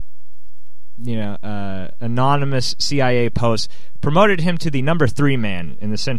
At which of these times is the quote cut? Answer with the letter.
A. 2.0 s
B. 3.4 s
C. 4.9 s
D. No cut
D